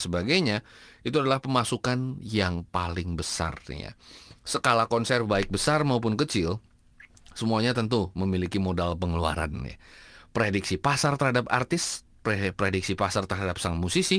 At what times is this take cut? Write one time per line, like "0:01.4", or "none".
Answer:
none